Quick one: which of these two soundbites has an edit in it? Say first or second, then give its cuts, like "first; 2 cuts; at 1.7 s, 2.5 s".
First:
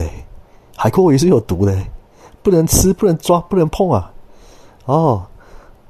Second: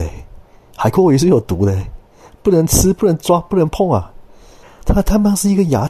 second; 1 cut; at 4.6 s